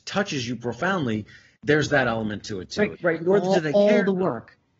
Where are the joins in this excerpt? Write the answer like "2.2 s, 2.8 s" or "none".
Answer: 1.5 s, 2.9 s